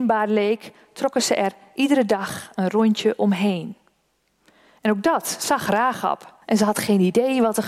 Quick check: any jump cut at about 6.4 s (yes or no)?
yes